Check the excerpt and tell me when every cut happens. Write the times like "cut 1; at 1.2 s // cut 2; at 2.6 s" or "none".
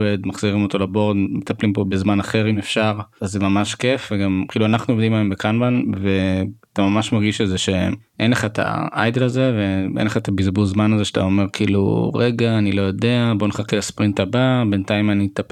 none